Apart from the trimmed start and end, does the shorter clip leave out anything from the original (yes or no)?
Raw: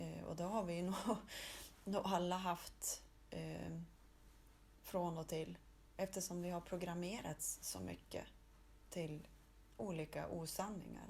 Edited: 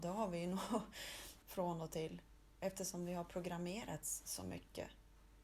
yes